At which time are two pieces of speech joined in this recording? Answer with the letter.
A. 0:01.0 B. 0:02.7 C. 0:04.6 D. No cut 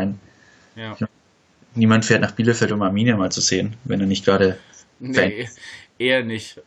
D